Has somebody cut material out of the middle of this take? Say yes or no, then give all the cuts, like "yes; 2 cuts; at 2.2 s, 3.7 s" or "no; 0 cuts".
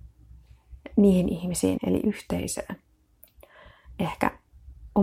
yes; 1 cut; at 1.8 s